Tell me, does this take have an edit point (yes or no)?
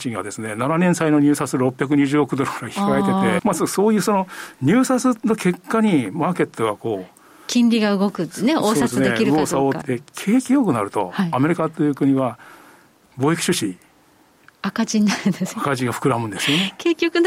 yes